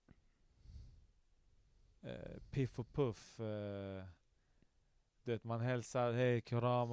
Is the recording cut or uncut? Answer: uncut